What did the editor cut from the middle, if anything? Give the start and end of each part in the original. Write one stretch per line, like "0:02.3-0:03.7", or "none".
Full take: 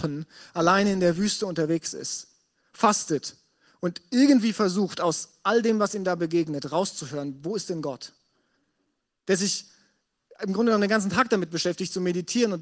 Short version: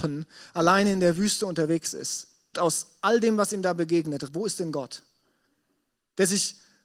0:02.5-0:05.0
0:06.7-0:07.4